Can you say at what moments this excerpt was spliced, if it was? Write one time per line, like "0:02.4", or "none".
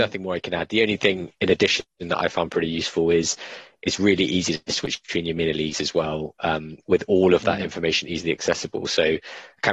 none